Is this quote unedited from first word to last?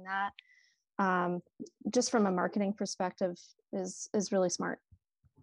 yes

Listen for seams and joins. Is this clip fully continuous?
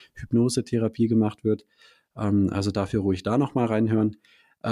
yes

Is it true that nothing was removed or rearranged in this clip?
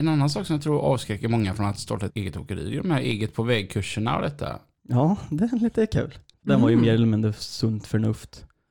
no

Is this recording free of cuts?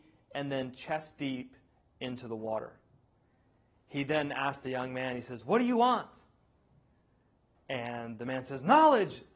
yes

